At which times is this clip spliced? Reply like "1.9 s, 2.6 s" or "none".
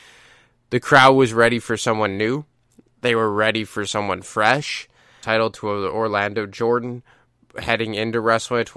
5.2 s